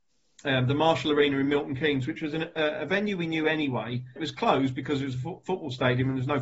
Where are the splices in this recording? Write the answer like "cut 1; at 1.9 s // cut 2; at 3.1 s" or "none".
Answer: cut 1; at 4.2 s